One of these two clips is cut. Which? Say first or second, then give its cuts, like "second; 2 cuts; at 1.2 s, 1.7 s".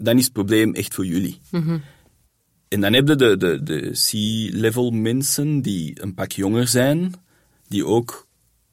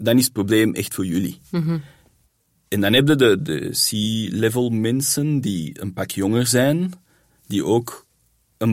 second; 1 cut; at 3.4 s